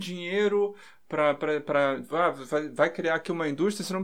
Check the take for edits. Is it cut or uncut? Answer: uncut